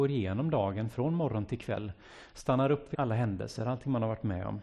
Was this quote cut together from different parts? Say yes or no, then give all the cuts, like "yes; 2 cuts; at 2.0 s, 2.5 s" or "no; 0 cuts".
yes; 1 cut; at 2.9 s